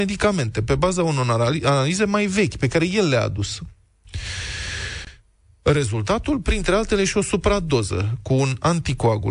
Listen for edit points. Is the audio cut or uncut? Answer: uncut